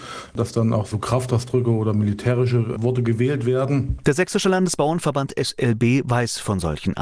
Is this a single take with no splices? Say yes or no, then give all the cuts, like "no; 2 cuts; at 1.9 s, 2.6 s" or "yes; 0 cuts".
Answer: no; 1 cut; at 4.0 s